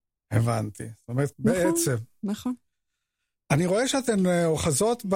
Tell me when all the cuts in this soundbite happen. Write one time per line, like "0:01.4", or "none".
0:01.3